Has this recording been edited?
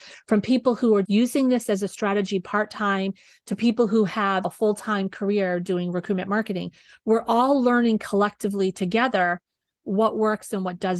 yes; 1 cut; at 1.1 s

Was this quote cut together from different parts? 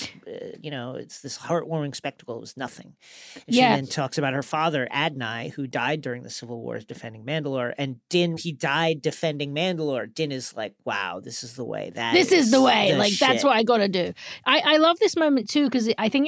yes; 1 cut; at 8.4 s

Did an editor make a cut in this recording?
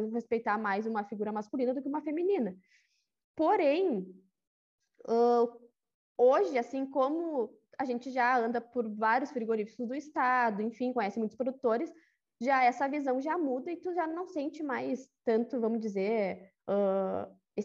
no; 0 cuts

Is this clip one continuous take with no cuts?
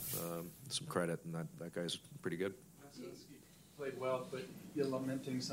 yes; 0 cuts

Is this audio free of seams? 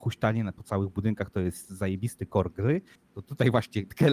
yes; 0 cuts

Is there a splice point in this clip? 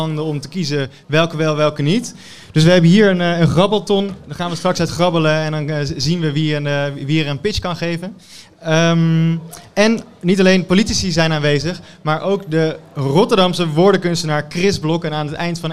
no; 0 cuts

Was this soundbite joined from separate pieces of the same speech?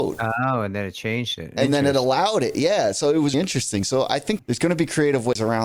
yes; 2 cuts; at 3.3 s, 4.4 s

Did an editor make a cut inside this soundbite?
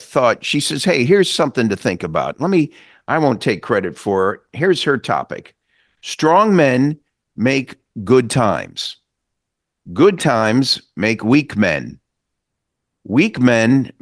no; 0 cuts

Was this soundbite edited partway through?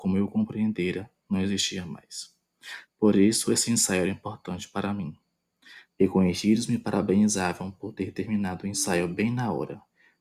yes; 2 cuts; at 2.8 s, 5.8 s

